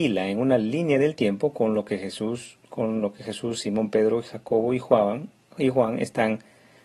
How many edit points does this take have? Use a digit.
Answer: 0